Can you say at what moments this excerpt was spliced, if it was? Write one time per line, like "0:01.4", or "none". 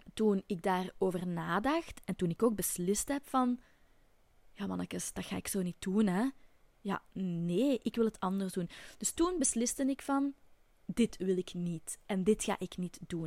none